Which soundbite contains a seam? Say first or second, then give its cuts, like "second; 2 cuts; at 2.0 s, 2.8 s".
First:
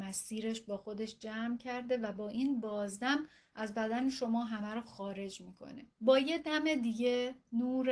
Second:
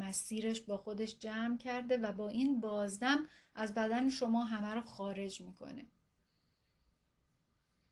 first; 1 cut; at 5.9 s